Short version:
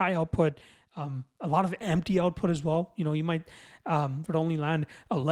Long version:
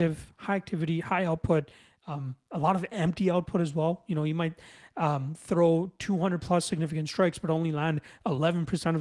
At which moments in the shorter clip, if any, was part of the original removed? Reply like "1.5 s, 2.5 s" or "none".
4.3 s